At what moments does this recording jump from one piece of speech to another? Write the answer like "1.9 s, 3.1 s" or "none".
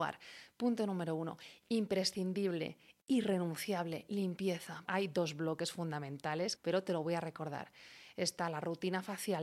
4.9 s, 6.6 s